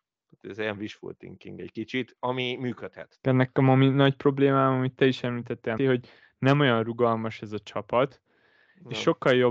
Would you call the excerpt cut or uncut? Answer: cut